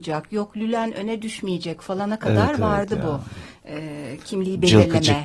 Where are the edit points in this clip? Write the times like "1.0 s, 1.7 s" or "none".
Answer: none